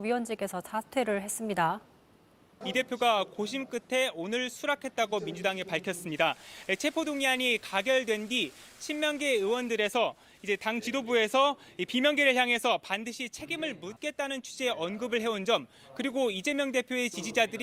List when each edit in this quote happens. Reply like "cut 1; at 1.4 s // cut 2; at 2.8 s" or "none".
cut 1; at 2.6 s